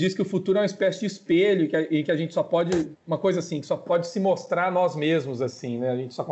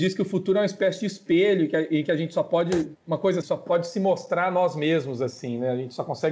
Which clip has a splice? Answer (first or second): second